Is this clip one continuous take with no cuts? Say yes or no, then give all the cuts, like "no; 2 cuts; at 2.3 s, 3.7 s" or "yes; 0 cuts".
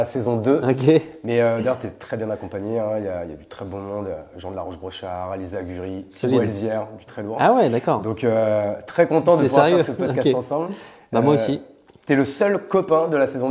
no; 1 cut; at 7.1 s